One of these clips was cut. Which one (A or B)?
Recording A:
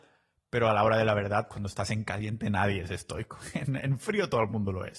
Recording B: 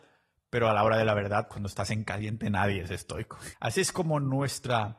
B